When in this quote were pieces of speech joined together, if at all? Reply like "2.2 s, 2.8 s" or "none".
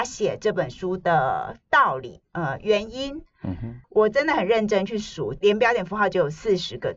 3.8 s